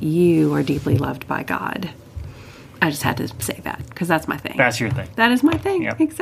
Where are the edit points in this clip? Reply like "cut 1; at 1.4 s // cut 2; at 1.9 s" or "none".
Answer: cut 1; at 3.9 s